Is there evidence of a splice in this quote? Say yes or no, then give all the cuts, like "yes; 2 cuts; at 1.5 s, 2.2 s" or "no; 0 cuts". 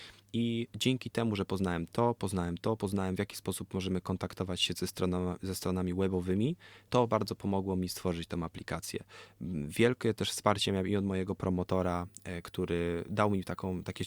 yes; 1 cut; at 6.9 s